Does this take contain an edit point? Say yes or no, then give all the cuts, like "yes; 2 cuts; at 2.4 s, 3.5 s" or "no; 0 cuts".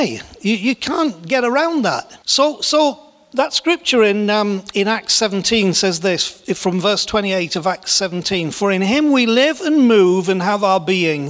yes; 1 cut; at 2.2 s